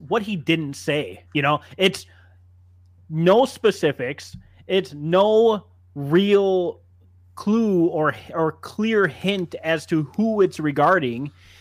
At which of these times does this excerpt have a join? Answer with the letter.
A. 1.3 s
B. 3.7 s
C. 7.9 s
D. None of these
A